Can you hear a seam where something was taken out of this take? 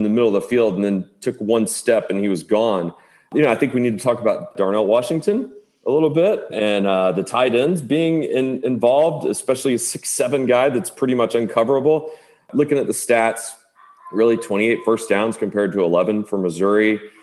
no; 0 cuts

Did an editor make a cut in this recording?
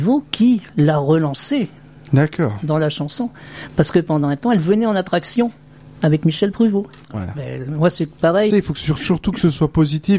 yes; 2 cuts; at 7.0 s, 8.5 s

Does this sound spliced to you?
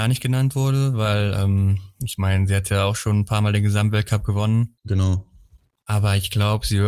no; 0 cuts

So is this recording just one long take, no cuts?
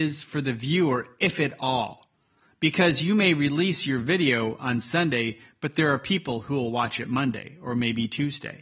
yes; 0 cuts

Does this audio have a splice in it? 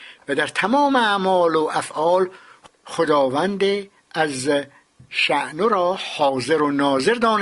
no; 0 cuts

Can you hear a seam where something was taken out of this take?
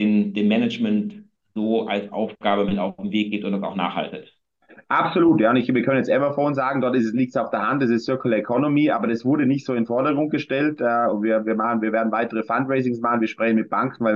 no; 0 cuts

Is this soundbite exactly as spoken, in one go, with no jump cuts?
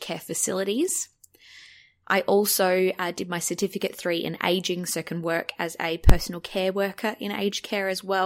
no; 1 cut; at 2.0 s

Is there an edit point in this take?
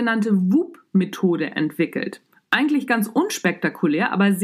no; 0 cuts

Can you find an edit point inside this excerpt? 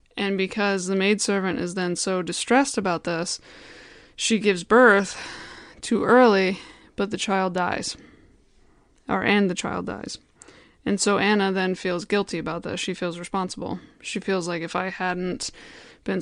no; 0 cuts

